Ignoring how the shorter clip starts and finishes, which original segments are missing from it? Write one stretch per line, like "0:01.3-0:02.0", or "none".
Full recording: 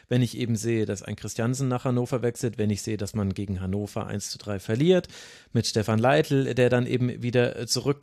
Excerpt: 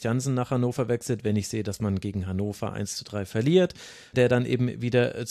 0:05.5-0:06.5